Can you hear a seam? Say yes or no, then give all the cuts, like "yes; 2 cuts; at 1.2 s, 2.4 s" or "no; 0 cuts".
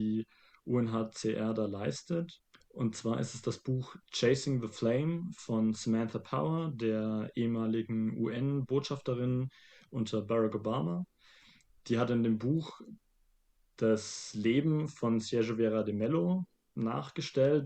yes; 1 cut; at 2.6 s